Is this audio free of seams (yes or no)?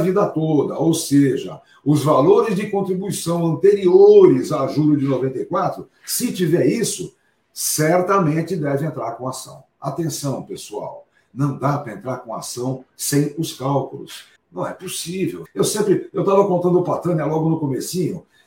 no